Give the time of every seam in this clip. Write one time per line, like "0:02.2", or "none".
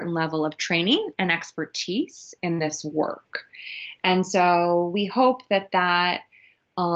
none